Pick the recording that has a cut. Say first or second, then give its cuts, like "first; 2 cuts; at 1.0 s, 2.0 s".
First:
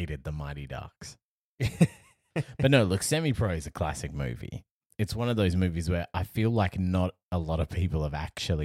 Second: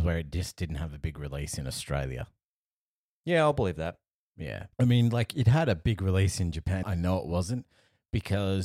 second; 2 cuts; at 4.7 s, 6.8 s